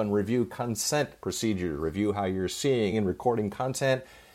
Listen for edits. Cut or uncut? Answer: cut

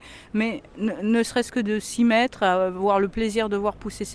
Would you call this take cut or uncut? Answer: uncut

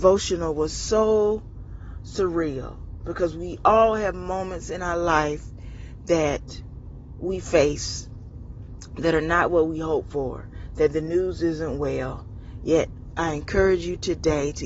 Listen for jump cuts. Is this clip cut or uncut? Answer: uncut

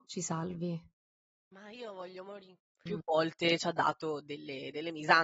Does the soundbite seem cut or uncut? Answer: cut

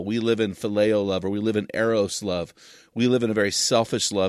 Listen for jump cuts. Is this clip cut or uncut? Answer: uncut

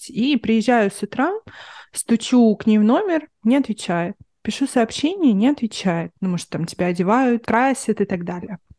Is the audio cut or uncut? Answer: cut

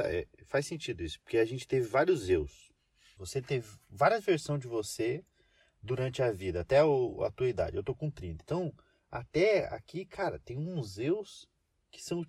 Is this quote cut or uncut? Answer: uncut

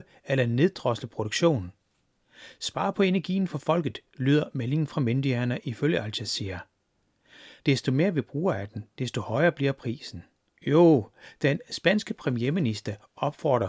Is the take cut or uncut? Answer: cut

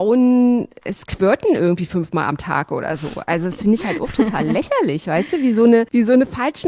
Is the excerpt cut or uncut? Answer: uncut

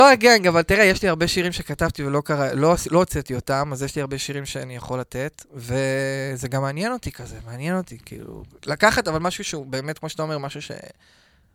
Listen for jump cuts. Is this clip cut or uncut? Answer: uncut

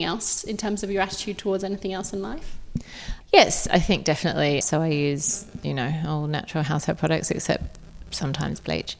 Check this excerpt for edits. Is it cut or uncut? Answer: cut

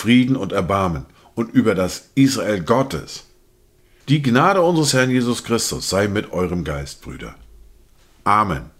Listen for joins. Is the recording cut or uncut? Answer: cut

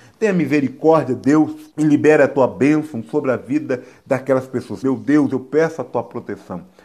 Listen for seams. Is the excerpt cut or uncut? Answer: cut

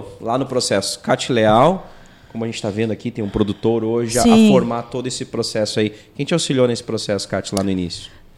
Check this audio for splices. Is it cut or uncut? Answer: uncut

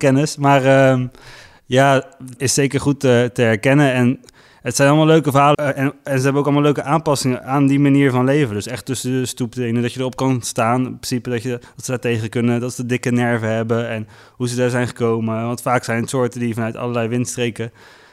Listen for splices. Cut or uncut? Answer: cut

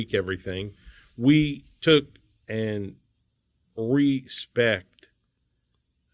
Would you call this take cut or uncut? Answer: uncut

